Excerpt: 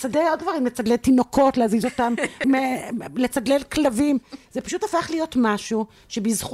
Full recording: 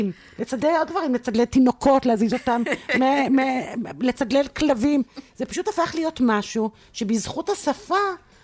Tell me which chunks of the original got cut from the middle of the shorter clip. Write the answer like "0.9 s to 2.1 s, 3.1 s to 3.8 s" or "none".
2.9 s to 3.3 s